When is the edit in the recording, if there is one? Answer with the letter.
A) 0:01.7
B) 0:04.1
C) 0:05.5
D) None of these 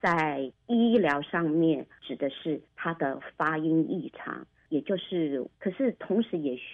C